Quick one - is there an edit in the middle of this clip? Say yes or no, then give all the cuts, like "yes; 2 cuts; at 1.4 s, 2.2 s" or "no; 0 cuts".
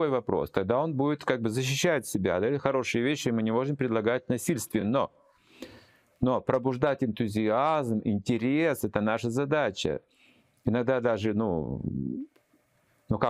no; 0 cuts